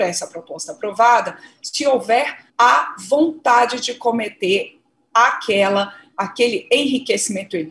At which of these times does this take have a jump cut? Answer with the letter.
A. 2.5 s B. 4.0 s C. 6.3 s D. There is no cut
A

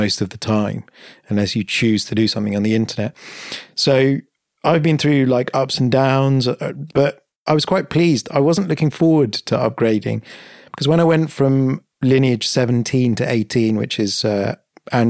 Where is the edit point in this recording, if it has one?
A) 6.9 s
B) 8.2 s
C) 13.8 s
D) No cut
A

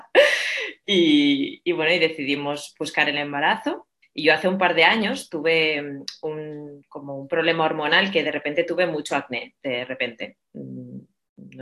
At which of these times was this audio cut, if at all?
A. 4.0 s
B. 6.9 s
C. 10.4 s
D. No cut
A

